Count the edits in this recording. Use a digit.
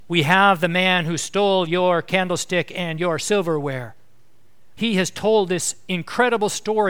1